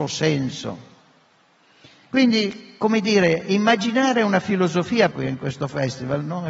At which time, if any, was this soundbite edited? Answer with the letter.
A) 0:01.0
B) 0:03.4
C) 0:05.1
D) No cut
C